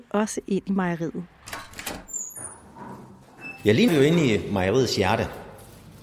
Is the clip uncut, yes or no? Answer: no